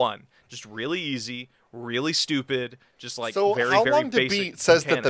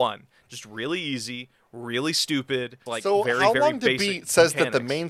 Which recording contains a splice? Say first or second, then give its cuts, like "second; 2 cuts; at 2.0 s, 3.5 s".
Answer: second; 1 cut; at 2.9 s